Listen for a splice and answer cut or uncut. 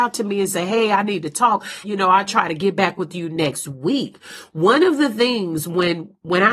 cut